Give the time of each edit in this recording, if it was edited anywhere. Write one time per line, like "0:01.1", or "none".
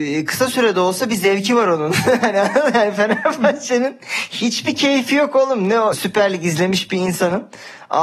0:05.9